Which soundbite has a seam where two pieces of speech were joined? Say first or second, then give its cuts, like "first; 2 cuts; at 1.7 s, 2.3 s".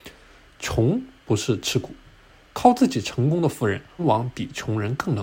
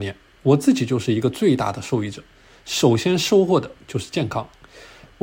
first; 1 cut; at 4.0 s